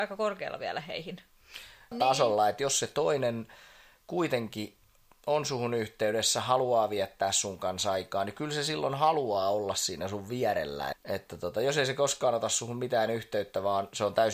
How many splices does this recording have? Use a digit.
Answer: 2